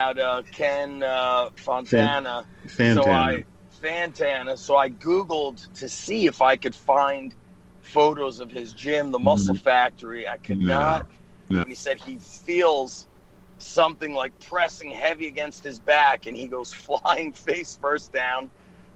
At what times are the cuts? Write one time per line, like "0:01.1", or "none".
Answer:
0:11.6